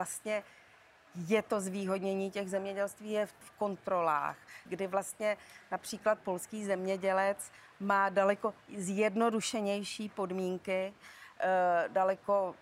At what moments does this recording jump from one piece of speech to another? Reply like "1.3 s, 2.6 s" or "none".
3.4 s, 4.6 s